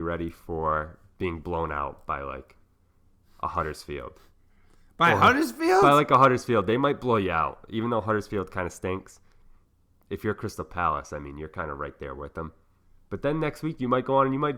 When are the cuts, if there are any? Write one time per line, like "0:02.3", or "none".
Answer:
none